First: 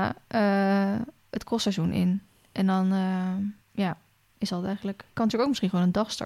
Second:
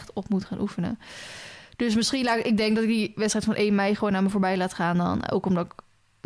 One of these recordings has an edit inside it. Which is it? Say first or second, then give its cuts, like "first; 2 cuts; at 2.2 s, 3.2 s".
first; 1 cut; at 3.6 s